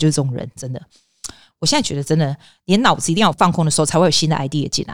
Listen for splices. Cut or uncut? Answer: cut